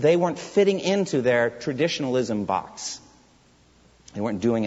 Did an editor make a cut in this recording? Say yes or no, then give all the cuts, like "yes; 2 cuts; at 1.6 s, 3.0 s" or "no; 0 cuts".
no; 0 cuts